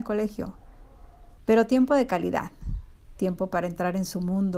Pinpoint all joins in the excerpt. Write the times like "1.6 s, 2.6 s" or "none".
1.4 s